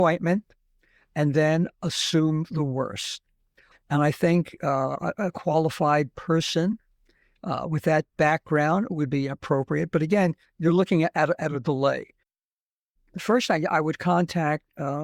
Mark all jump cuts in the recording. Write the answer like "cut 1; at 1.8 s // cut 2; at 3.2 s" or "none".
cut 1; at 3.7 s

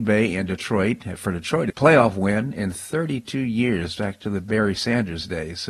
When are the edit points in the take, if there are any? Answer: cut 1; at 1.7 s

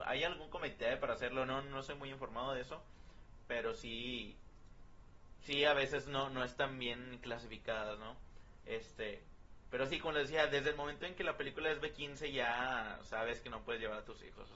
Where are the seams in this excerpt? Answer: none

